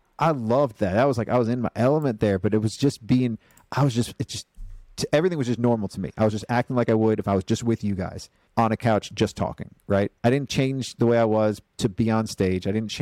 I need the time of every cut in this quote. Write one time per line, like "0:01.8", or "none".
0:08.5
0:10.2